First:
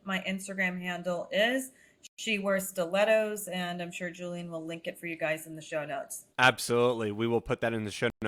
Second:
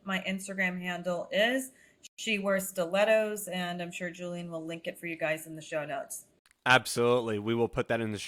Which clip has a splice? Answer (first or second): first